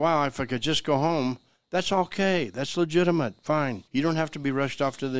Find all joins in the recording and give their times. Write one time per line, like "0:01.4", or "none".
0:03.9